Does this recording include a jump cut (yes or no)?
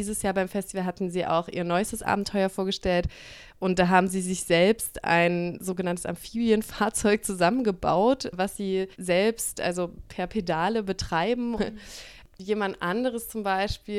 yes